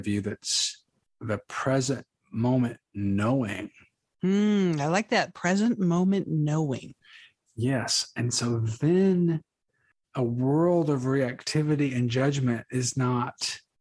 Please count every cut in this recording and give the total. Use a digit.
0